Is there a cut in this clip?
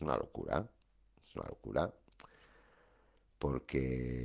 no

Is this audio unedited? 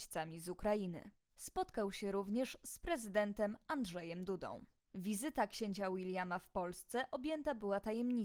yes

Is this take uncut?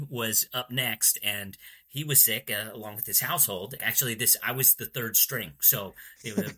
no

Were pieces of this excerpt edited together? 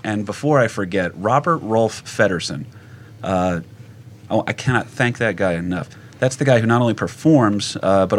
no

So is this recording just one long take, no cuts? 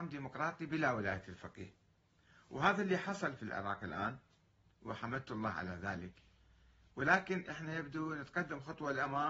yes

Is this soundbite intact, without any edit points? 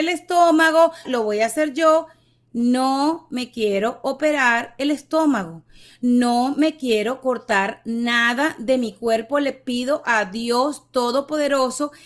no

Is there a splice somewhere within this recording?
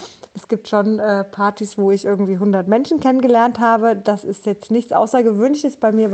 no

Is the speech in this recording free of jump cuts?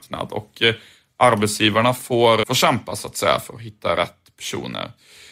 no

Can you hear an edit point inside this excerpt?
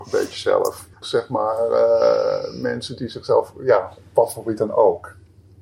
yes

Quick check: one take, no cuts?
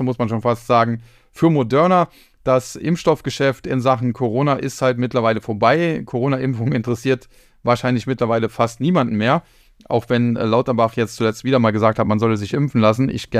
yes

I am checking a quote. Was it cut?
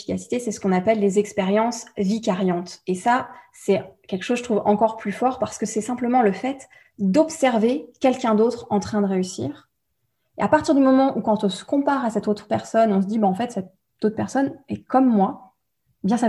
no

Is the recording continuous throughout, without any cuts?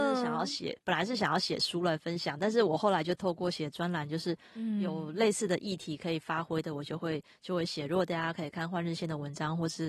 yes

